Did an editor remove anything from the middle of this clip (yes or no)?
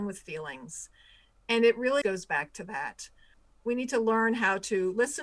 yes